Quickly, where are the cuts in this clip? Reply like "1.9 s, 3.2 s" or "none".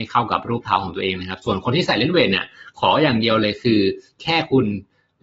none